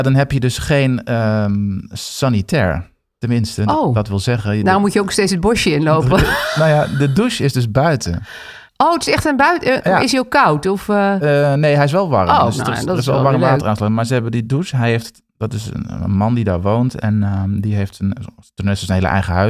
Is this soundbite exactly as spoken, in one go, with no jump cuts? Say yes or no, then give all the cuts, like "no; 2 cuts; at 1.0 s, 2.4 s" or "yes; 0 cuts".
no; 1 cut; at 8.7 s